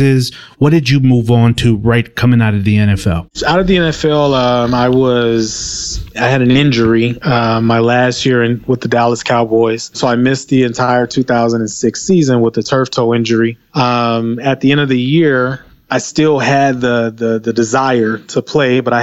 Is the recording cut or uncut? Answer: cut